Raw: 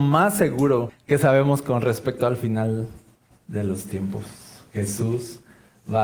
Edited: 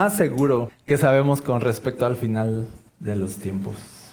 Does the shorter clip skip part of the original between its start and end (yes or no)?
yes